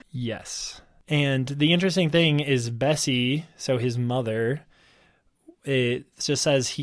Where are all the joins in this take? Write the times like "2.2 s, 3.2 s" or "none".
none